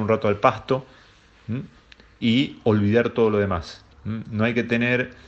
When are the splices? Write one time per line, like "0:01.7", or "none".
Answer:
0:02.2
0:03.9